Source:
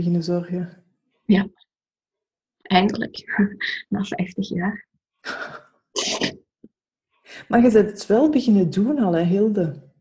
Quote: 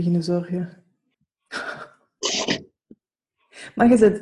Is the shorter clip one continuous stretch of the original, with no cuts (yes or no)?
no